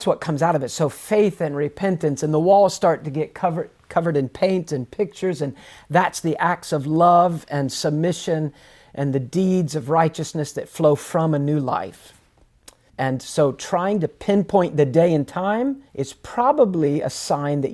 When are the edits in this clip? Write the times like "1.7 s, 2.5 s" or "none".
12.9 s, 15.9 s

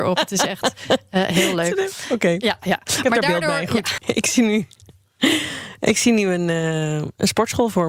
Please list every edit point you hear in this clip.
4.0 s

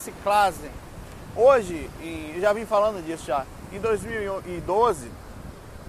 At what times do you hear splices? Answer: none

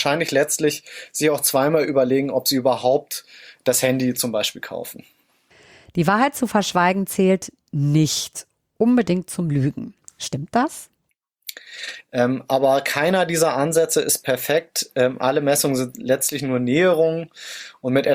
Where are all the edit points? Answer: 12.0 s

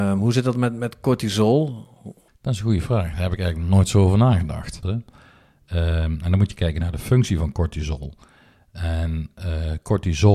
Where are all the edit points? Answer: 2.3 s, 4.8 s

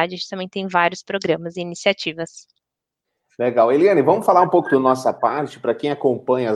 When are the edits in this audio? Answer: none

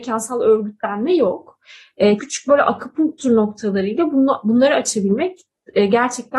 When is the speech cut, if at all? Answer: 2.2 s

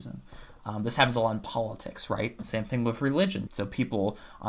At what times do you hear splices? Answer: 2.4 s, 3.5 s

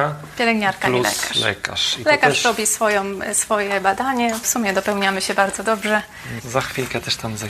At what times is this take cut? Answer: 4.4 s, 6.4 s

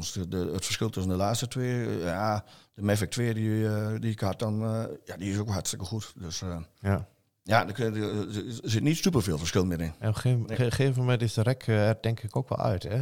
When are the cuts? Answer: none

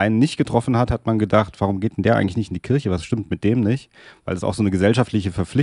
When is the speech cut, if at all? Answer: none

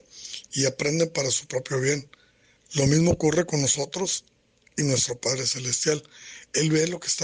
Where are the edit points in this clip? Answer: none

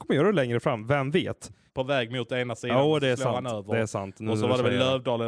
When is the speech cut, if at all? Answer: 1.7 s

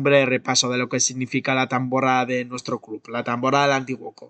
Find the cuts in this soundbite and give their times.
none

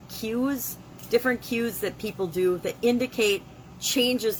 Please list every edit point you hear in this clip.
none

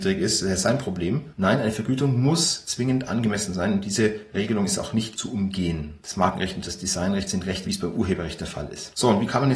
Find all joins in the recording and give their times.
6.0 s, 7.6 s

